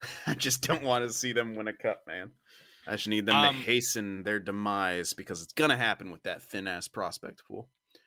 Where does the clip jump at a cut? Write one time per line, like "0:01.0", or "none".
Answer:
0:02.8